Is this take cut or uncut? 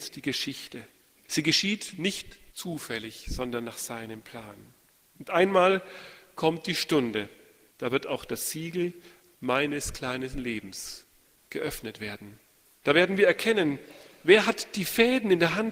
uncut